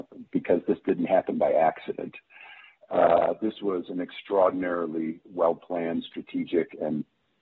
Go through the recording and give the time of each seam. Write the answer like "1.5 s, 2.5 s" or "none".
none